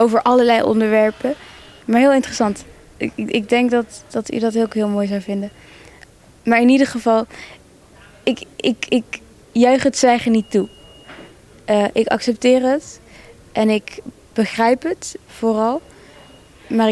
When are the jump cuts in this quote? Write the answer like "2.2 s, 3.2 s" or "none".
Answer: 4.1 s, 15.3 s